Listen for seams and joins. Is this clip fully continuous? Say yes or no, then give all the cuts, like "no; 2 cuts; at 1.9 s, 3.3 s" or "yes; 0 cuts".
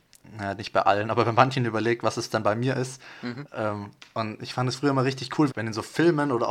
no; 1 cut; at 5.5 s